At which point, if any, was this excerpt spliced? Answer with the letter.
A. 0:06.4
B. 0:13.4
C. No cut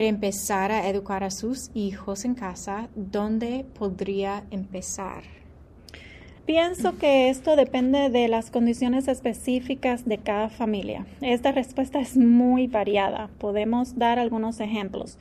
A